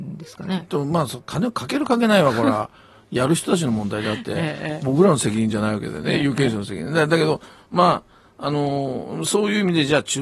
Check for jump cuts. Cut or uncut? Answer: uncut